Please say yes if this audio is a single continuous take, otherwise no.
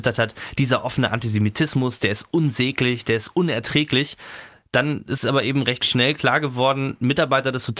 yes